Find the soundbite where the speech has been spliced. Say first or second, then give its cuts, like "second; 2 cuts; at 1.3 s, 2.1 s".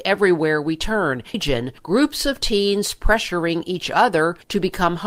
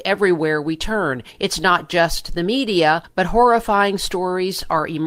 first; 1 cut; at 1.3 s